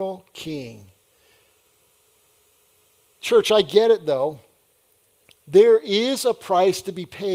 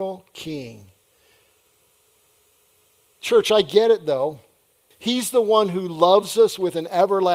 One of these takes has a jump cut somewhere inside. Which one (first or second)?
second